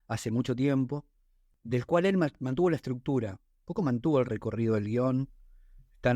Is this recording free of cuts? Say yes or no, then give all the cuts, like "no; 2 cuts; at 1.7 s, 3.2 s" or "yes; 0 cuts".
yes; 0 cuts